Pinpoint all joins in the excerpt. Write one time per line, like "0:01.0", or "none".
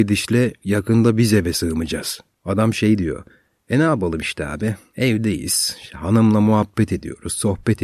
0:02.3